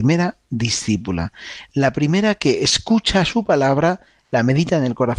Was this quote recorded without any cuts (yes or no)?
yes